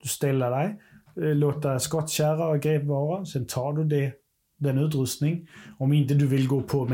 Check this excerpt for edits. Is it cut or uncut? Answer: uncut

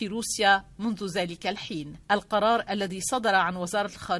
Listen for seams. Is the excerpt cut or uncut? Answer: cut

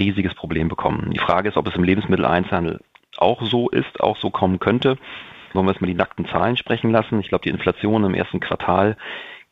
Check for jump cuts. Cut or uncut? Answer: uncut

